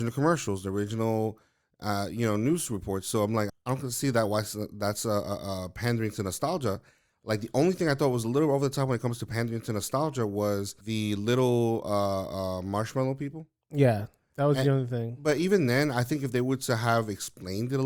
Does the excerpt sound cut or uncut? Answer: cut